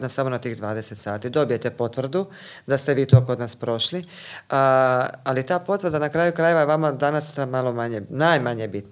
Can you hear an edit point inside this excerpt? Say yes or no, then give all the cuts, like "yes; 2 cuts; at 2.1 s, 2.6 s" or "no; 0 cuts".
no; 0 cuts